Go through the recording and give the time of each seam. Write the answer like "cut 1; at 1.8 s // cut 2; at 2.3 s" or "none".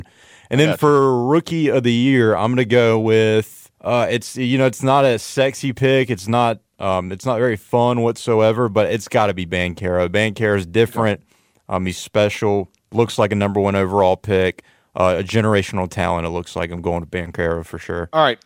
cut 1; at 3.7 s